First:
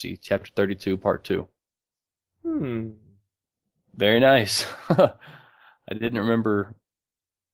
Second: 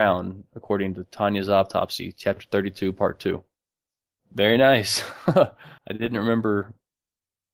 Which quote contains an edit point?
second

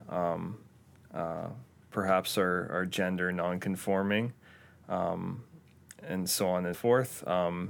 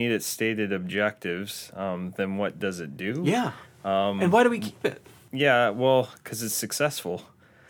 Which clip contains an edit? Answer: first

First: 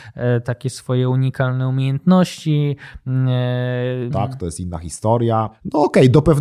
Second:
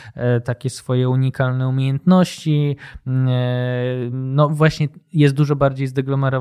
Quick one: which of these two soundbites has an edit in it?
first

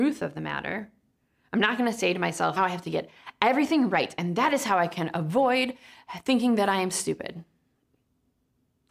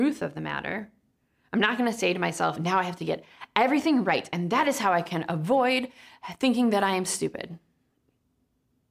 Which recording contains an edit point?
first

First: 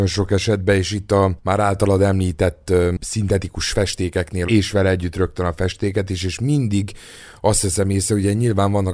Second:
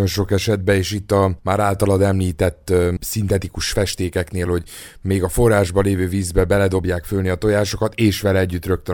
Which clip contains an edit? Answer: first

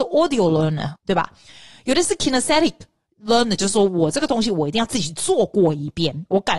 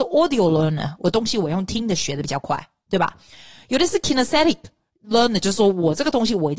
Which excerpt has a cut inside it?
first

